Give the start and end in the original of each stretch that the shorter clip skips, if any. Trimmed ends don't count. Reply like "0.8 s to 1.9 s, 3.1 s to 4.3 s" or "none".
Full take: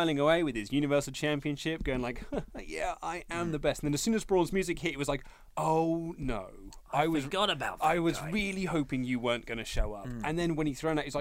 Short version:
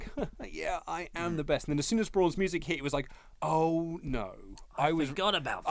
none